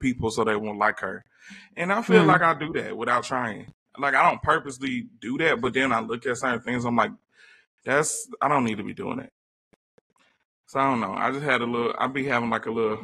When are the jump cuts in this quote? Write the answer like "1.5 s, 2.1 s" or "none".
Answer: none